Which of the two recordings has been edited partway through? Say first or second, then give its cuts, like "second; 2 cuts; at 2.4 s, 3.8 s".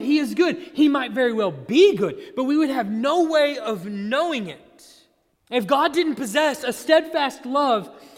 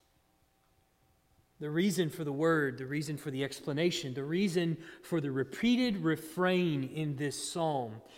first; 1 cut; at 5.3 s